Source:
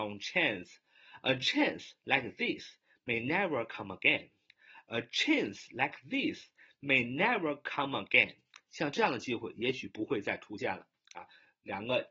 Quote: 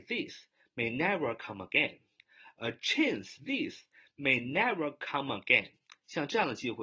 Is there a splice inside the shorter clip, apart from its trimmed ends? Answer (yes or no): yes